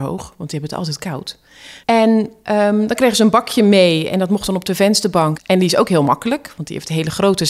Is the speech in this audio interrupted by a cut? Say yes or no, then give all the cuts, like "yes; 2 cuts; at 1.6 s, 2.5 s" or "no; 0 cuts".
yes; 2 cuts; at 1.8 s, 5.4 s